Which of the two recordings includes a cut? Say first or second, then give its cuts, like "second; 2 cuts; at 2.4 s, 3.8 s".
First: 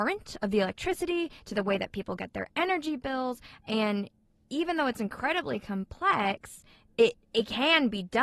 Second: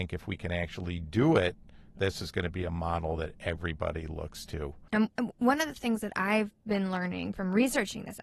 second; 1 cut; at 4.9 s